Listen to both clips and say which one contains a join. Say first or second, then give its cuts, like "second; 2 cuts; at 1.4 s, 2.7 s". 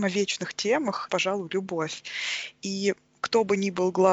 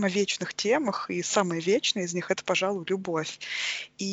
first; 1 cut; at 1.1 s